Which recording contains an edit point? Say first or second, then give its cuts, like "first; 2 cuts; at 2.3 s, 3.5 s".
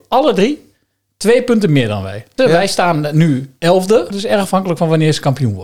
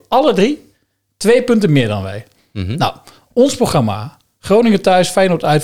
first; 2 cuts; at 2.4 s, 4.1 s